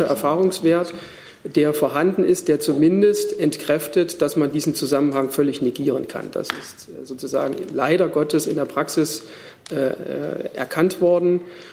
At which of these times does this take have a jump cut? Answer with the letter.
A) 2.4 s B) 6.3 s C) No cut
C